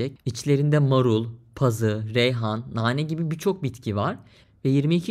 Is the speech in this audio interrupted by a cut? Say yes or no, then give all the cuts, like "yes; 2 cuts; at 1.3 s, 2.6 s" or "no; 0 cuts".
no; 0 cuts